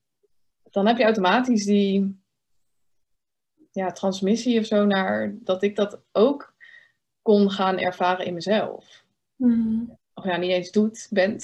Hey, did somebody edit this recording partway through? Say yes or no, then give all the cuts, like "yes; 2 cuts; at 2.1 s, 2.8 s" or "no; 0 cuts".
yes; 2 cuts; at 5.4 s, 10.0 s